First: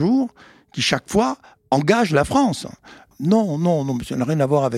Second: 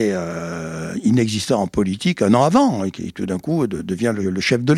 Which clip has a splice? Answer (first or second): first